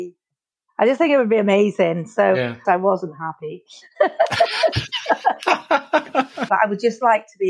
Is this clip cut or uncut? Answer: cut